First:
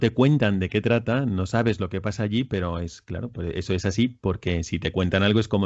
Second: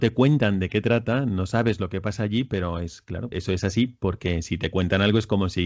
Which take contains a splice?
second; 1 cut; at 3.3 s

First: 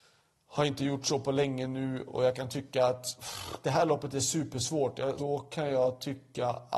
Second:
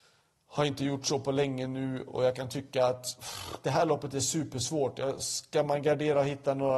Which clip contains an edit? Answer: first; 1 cut; at 5.2 s

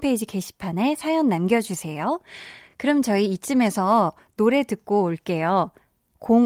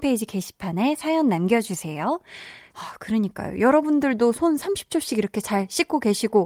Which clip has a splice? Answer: second; 1 cut; at 2.7 s

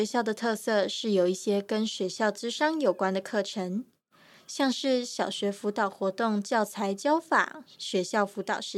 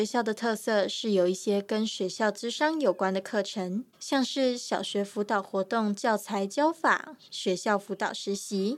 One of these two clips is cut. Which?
second; 1 cut; at 3.9 s

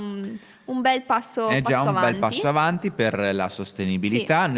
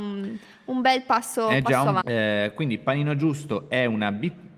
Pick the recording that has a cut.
second; 1 cut; at 2.0 s

